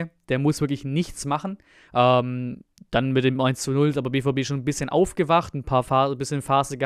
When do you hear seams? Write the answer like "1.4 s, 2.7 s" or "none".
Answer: 1.9 s